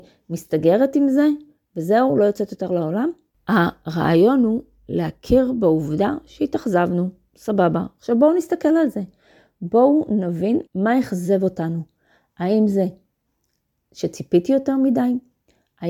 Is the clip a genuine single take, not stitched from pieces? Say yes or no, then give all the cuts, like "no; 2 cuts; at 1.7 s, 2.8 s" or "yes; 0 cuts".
no; 2 cuts; at 3.3 s, 10.7 s